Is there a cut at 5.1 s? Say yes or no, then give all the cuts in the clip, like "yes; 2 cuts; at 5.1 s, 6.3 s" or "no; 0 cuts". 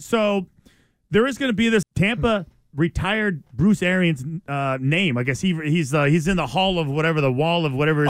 no; 1 cut; at 1.8 s